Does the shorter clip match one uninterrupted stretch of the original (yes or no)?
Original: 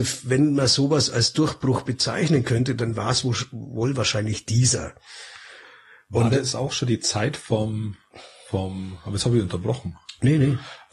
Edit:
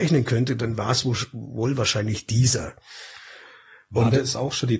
yes